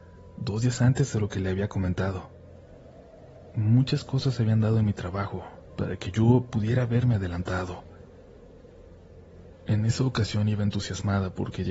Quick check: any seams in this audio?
yes; 2 cuts; at 5.7 s, 9.5 s

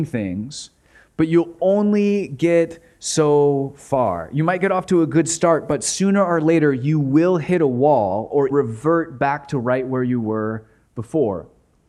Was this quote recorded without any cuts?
no; 1 cut; at 8.5 s

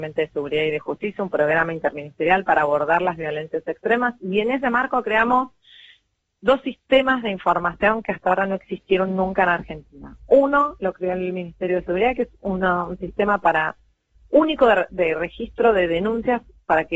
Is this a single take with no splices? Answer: yes; 0 cuts

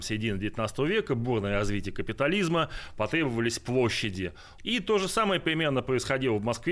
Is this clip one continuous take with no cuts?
no; 1 cut; at 4.6 s

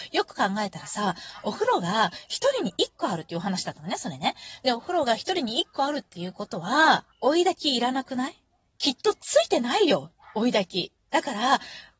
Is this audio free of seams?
no; 1 cut; at 7.1 s

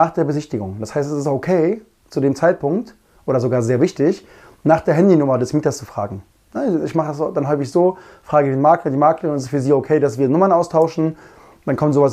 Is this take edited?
no; 0 cuts

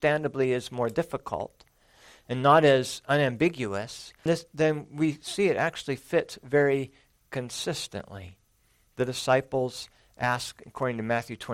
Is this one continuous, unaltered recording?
no; 1 cut; at 4.3 s

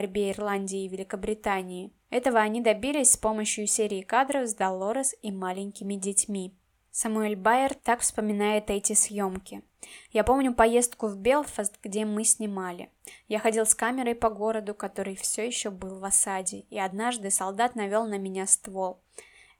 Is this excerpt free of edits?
yes; 0 cuts

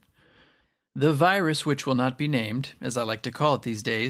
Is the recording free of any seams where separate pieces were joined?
yes; 0 cuts

